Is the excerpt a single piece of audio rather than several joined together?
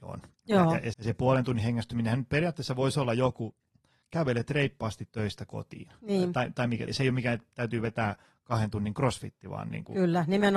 no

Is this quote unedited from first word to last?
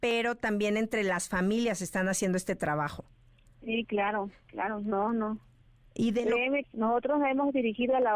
no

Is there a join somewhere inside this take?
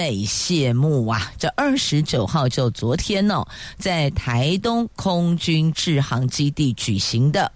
yes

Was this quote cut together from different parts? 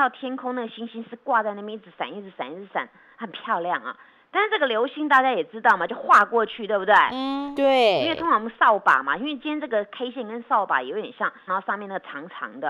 yes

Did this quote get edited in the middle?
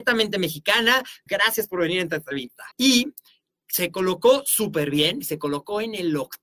yes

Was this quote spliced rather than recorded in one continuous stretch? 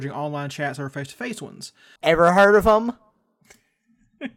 yes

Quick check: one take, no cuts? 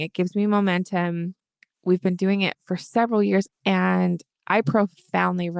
no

